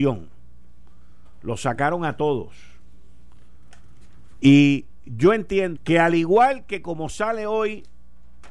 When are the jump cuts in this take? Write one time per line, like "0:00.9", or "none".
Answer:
0:04.4
0:05.7

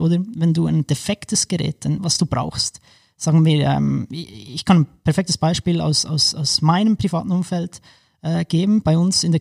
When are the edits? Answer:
0:02.0

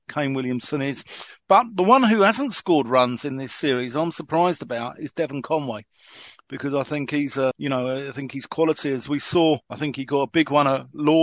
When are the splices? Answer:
0:07.5
0:09.6

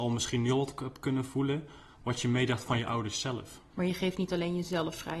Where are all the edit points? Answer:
0:03.7

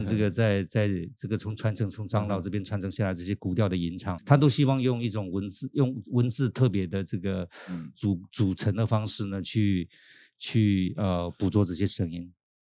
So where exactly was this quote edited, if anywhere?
0:04.2

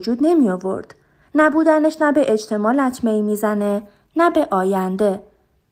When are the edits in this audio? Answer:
none

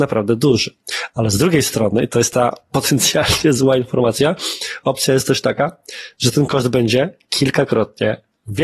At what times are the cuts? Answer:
none

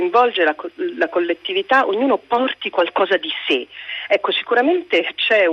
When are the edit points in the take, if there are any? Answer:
none

